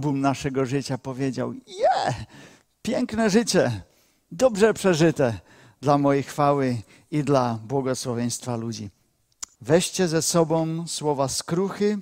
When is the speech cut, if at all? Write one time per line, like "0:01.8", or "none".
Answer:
0:09.6